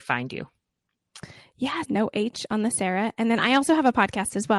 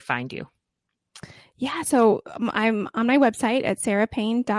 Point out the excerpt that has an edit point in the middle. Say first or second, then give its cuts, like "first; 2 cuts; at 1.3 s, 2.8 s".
first; 1 cut; at 1.8 s